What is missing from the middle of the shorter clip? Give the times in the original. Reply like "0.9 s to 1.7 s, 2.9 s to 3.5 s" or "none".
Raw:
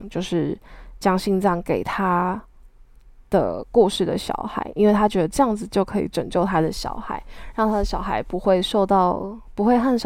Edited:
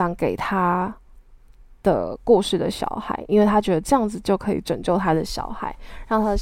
none